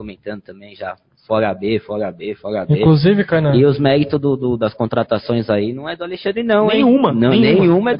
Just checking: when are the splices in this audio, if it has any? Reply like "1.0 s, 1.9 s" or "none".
none